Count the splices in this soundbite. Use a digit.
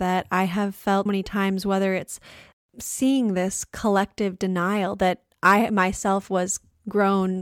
1